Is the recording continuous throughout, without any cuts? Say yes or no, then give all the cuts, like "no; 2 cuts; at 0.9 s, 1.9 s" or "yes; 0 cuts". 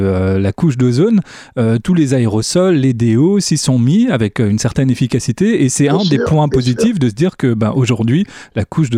yes; 0 cuts